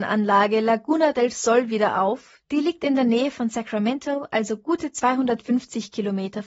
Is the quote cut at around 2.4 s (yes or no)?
no